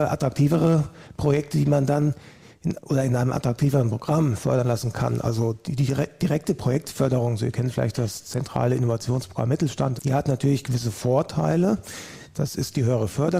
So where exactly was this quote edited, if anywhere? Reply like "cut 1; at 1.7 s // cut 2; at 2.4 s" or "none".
cut 1; at 10.0 s